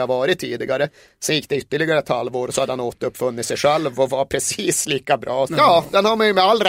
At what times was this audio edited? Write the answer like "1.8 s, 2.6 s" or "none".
5.5 s